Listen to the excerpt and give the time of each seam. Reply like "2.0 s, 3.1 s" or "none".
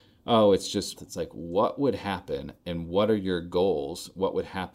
1.0 s